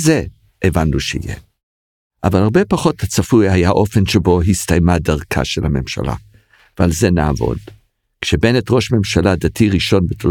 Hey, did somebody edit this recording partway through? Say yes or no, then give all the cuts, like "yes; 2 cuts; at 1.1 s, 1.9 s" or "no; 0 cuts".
no; 0 cuts